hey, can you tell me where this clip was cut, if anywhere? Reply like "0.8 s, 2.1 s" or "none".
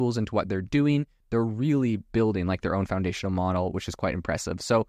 none